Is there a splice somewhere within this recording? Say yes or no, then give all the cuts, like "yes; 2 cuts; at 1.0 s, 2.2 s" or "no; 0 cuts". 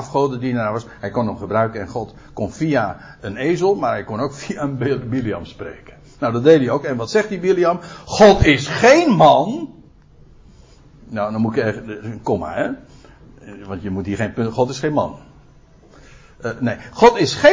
no; 0 cuts